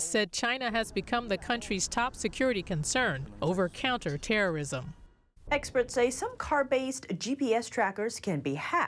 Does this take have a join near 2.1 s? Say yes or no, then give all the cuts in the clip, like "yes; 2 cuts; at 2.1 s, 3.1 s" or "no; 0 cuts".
no; 1 cut; at 5.5 s